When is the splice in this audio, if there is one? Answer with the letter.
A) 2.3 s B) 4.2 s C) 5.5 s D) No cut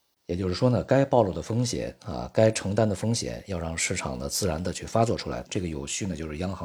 C